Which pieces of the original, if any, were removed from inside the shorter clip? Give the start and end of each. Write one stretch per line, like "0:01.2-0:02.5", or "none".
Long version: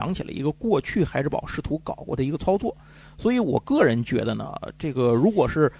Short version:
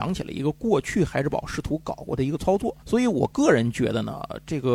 0:02.8-0:03.1